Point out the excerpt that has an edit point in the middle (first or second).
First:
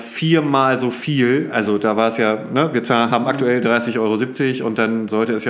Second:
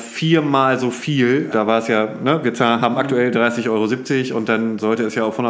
second